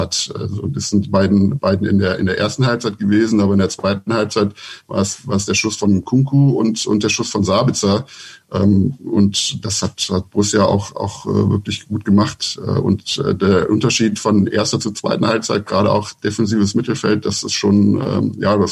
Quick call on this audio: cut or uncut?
uncut